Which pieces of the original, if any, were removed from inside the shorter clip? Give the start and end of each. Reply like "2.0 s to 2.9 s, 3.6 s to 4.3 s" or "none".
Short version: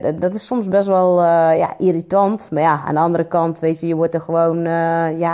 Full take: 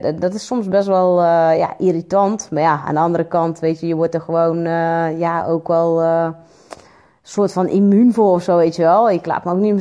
none